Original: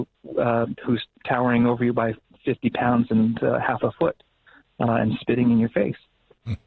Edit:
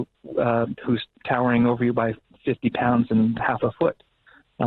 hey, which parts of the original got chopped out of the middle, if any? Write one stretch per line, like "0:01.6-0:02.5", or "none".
0:03.4-0:03.6